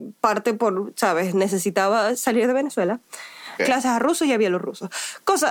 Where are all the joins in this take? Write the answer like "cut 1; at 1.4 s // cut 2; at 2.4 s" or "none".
cut 1; at 3.6 s